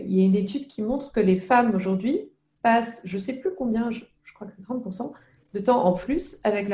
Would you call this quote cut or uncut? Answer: uncut